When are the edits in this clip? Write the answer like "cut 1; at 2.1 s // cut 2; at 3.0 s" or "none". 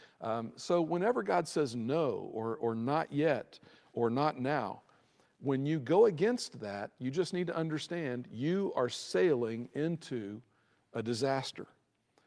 none